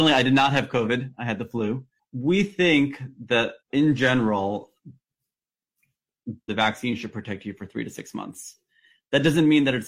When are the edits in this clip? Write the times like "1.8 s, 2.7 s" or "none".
2.0 s, 3.6 s, 6.5 s